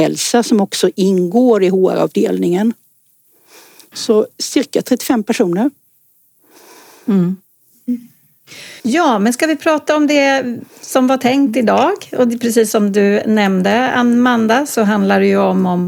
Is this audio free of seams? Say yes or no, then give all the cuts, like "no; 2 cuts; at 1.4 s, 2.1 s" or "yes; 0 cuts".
no; 1 cut; at 8.8 s